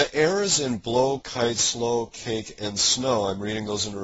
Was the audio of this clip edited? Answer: no; 0 cuts

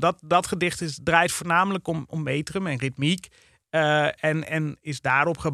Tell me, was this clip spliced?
no; 0 cuts

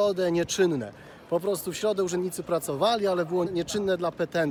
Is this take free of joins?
no; 1 cut; at 3.5 s

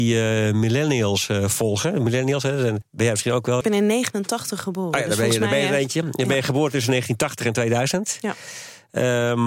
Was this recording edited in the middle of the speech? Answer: no; 0 cuts

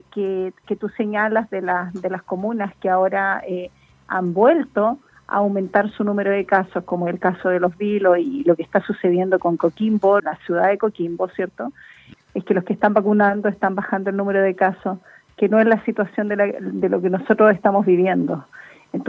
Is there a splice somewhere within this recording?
yes; 2 cuts; at 10.2 s, 12.1 s

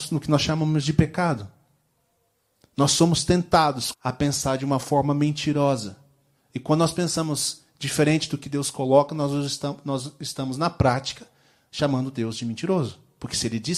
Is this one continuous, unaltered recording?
no; 1 cut; at 3.9 s

